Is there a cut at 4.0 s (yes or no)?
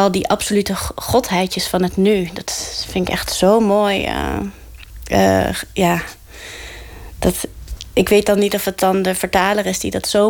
no